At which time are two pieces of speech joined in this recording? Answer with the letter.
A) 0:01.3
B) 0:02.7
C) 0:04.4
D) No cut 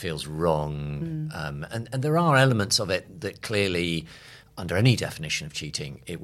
D